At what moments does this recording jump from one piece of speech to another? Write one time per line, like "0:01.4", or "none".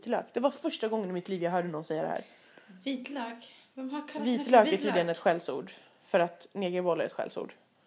none